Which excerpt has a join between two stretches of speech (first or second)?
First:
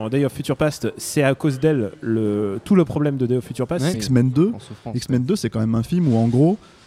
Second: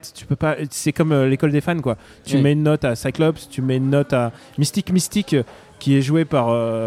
first